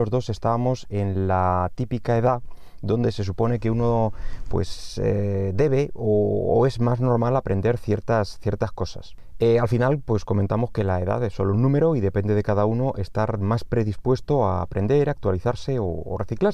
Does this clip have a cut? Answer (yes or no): no